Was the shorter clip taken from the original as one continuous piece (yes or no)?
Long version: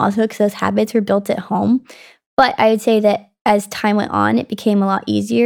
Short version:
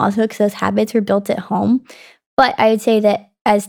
yes